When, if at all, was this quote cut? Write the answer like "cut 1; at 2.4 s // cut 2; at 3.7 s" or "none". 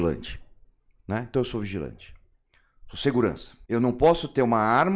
cut 1; at 3.6 s

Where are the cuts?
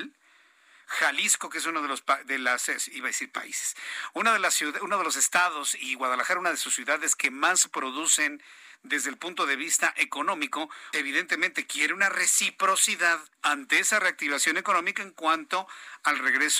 cut 1; at 10.9 s // cut 2; at 13.3 s

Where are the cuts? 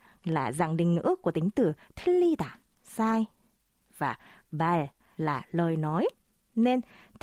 none

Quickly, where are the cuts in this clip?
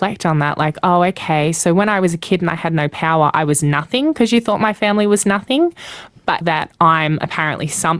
cut 1; at 6.4 s

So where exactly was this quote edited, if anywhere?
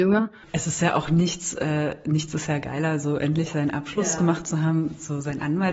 none

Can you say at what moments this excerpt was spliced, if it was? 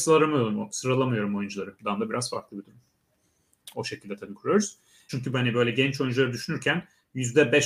cut 1; at 1.8 s // cut 2; at 3.7 s // cut 3; at 5.1 s

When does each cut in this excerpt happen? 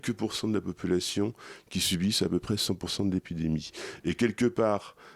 none

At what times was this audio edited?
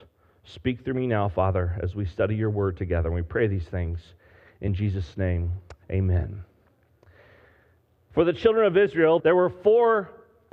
cut 1; at 5.8 s // cut 2; at 9.2 s

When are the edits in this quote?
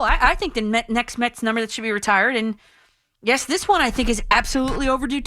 none

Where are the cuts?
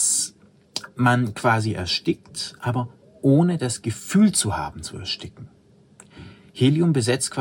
none

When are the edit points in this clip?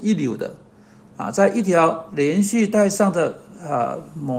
cut 1; at 1.1 s

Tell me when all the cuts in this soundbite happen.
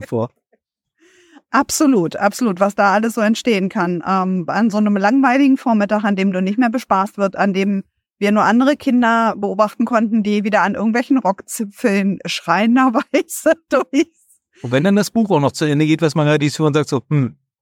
none

